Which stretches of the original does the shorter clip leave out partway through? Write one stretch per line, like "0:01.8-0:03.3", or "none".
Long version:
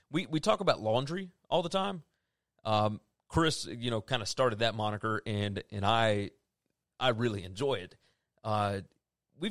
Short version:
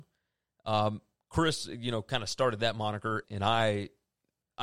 0:05.2-0:05.6